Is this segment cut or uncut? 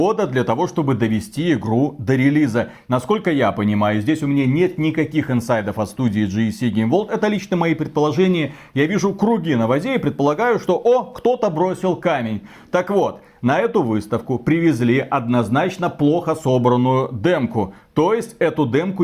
uncut